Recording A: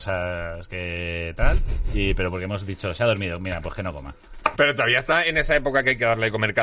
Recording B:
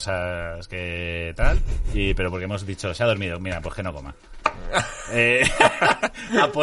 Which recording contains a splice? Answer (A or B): A